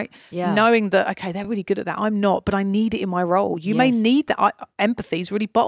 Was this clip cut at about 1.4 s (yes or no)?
no